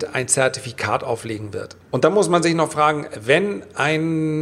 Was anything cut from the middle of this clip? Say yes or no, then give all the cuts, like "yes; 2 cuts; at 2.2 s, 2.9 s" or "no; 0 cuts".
yes; 1 cut; at 1.8 s